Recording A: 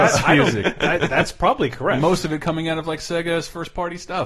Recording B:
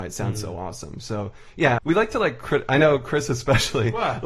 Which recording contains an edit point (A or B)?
B